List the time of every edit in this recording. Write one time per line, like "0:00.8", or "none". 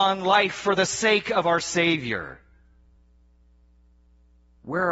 none